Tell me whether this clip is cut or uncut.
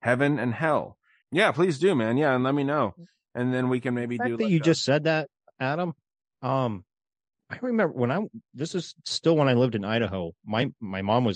cut